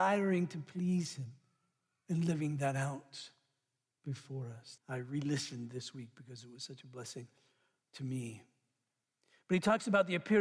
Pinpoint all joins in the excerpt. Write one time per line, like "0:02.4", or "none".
0:04.8